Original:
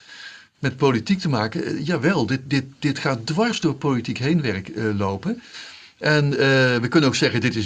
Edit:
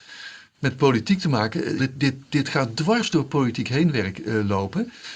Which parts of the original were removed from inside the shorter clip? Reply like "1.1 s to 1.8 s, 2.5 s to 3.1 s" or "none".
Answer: 1.8 s to 2.3 s